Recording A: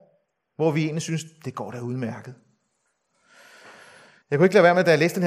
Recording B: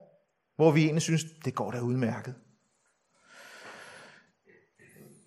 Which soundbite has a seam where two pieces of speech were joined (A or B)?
A